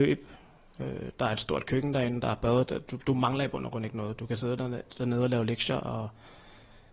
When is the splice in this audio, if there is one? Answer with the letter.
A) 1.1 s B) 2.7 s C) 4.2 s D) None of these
D